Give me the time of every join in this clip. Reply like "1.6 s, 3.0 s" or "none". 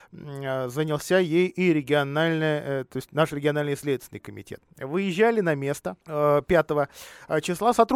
6.0 s